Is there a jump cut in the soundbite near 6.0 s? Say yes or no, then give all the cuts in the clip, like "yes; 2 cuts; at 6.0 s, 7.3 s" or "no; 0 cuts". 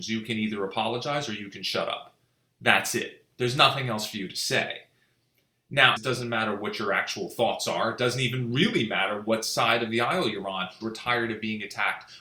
yes; 2 cuts; at 6.0 s, 10.8 s